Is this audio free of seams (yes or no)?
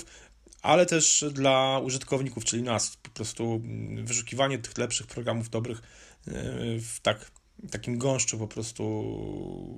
yes